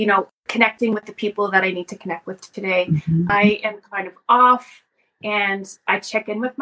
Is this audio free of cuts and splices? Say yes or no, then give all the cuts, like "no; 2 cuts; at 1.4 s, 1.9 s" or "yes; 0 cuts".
no; 1 cut; at 3.3 s